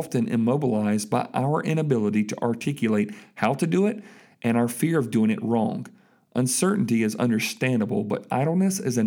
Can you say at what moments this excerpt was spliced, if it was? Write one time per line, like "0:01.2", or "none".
none

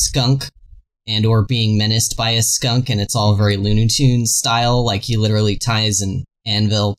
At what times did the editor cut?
none

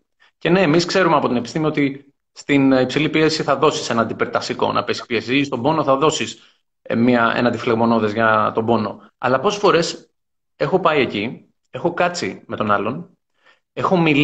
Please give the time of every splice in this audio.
0:09.1

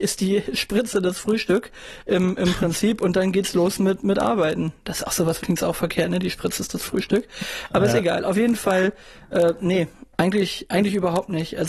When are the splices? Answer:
0:05.4

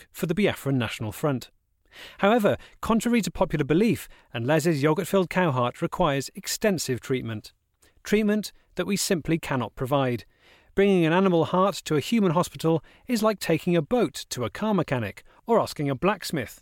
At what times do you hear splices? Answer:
0:04.2

